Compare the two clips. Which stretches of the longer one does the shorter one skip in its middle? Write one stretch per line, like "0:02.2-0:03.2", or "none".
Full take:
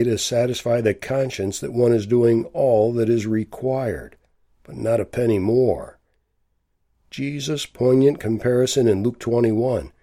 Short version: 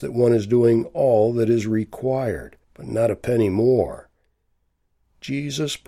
0:04.2-0:04.5